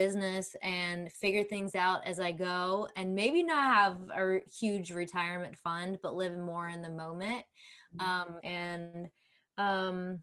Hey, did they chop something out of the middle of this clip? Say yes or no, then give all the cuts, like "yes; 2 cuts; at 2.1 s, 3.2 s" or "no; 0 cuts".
yes; 1 cut; at 8.4 s